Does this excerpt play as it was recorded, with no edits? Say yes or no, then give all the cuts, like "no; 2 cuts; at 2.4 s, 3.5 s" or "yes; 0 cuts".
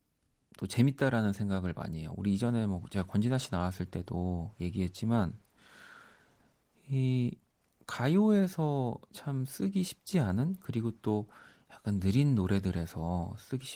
yes; 0 cuts